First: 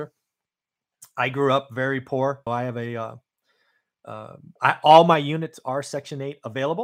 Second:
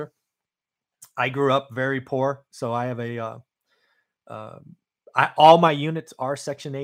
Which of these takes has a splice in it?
first; 2 cuts; at 2.5 s, 4.6 s

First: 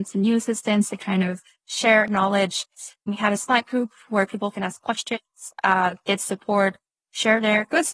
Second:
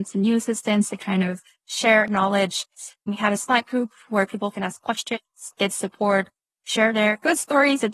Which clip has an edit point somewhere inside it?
second; 1 cut; at 5.5 s

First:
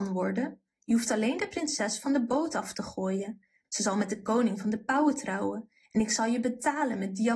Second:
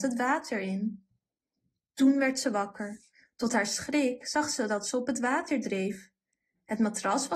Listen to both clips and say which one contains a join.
first; 1 cut; at 3.6 s

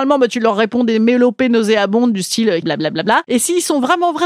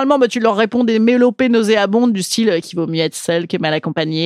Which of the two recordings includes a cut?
first; 1 cut; at 2.6 s

